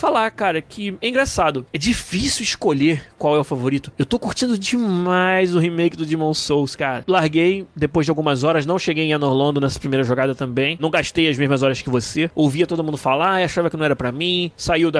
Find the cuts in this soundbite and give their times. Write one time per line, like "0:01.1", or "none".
0:07.0
0:12.3